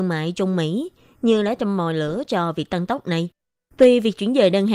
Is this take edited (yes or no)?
no